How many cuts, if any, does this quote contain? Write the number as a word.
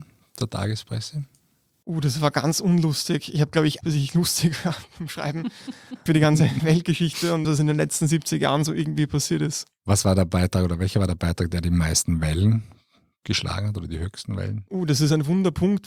three